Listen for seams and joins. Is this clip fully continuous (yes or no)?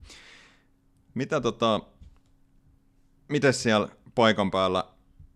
yes